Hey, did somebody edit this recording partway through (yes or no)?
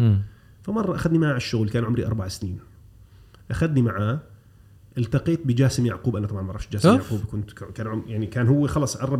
no